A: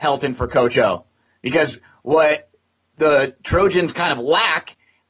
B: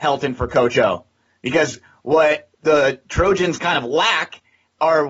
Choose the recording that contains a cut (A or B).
B